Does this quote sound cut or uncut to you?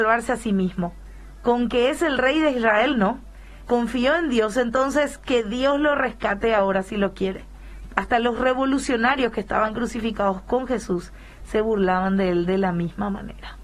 cut